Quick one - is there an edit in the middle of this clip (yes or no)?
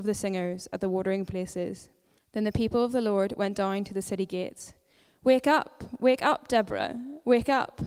yes